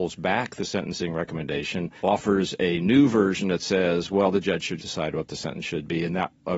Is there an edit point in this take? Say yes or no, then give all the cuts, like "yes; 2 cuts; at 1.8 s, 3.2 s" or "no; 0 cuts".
yes; 2 cuts; at 2.0 s, 4.8 s